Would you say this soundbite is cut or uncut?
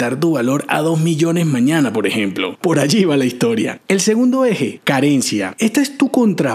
uncut